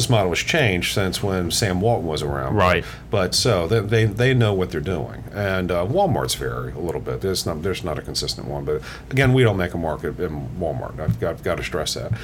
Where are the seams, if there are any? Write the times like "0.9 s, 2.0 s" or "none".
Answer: 3.3 s